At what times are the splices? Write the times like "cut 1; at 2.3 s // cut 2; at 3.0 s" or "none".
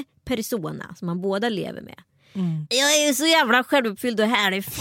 cut 1; at 2.7 s